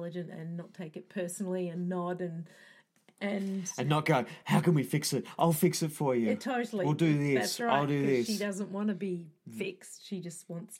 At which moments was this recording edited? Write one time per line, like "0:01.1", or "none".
none